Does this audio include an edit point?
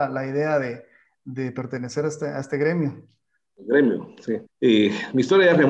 yes; 1 cut; at 4.4 s

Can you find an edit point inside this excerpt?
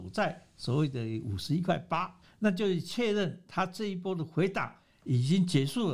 yes; 1 cut; at 2.2 s

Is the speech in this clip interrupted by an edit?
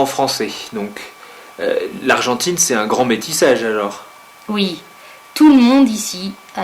no; 0 cuts

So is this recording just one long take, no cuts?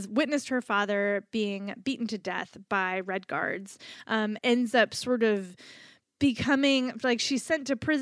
no; 1 cut; at 4.4 s

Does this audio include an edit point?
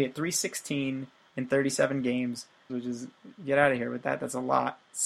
yes; 1 cut; at 2.7 s

